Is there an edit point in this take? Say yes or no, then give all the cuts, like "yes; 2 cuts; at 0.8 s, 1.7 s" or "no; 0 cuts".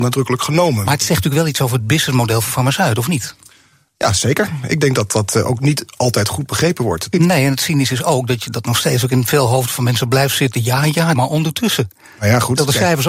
yes; 2 cuts; at 7.1 s, 11.1 s